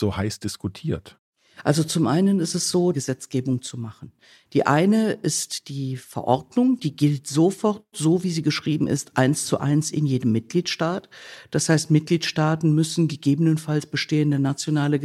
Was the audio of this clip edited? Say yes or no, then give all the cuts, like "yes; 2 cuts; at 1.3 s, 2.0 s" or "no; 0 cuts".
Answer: yes; 1 cut; at 2.9 s